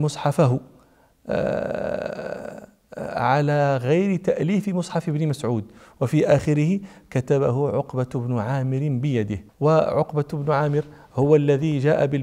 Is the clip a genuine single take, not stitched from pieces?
no; 1 cut; at 9.5 s

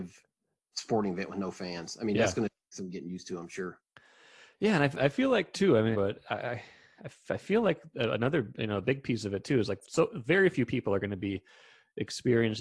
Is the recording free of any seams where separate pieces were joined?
no; 1 cut; at 5.9 s

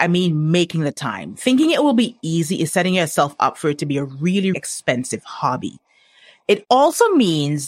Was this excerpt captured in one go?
no; 1 cut; at 4.5 s

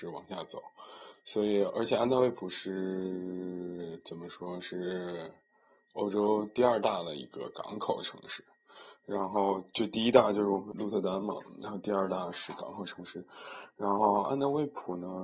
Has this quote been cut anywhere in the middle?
yes; 1 cut; at 10.7 s

